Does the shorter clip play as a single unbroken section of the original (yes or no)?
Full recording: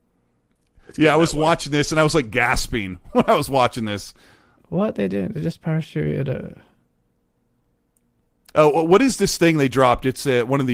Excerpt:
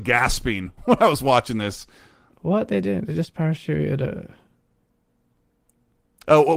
yes